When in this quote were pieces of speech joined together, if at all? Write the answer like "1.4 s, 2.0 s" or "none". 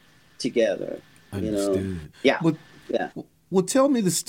2.1 s